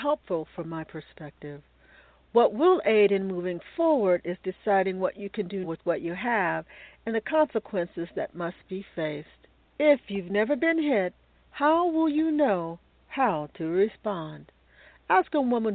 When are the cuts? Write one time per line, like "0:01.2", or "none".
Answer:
0:05.6
0:09.6